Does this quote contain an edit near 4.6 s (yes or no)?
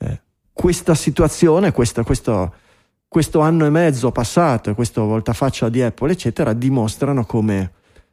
no